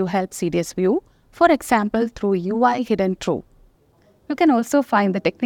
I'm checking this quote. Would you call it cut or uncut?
uncut